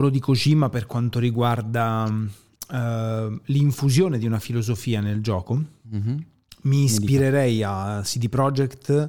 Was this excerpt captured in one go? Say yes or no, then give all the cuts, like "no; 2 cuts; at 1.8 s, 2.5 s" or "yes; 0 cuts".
yes; 0 cuts